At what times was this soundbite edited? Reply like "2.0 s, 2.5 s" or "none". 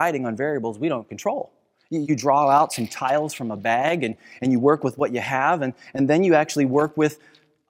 2.0 s